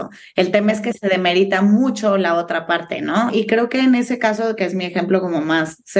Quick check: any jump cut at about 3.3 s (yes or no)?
yes